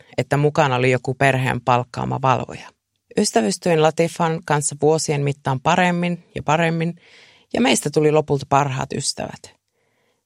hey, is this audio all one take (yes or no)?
no